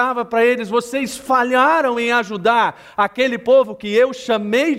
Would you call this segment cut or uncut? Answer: uncut